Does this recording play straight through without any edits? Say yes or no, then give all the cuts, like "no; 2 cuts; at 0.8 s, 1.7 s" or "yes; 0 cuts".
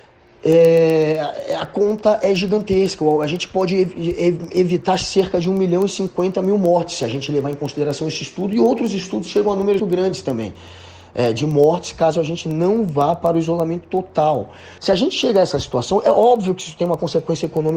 no; 2 cuts; at 9.8 s, 14.8 s